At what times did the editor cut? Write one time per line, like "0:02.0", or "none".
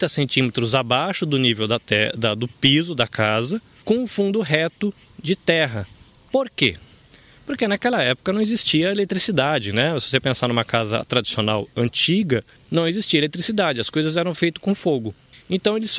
none